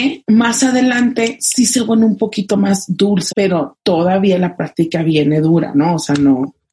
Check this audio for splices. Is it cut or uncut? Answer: cut